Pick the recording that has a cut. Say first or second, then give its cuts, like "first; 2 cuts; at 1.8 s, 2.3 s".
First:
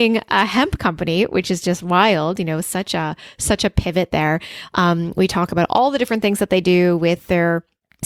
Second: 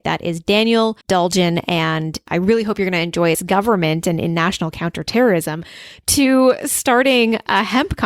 second; 2 cuts; at 1.0 s, 3.3 s